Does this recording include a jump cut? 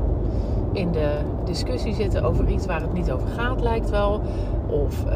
yes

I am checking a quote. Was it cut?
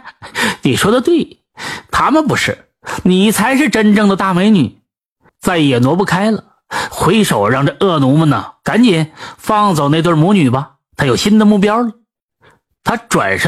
yes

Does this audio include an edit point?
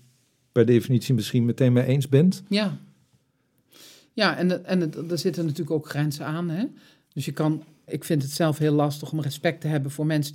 yes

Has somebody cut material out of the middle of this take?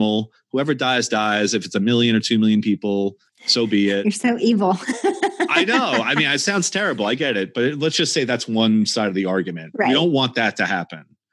no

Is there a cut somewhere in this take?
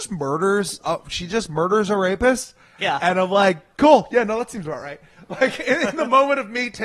yes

